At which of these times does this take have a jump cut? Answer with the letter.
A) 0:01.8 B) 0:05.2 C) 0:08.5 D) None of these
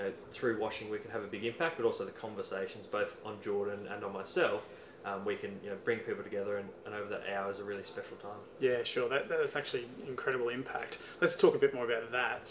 D